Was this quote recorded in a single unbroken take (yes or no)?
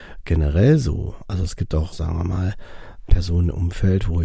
no